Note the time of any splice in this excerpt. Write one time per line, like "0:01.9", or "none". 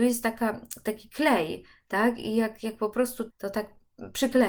0:03.3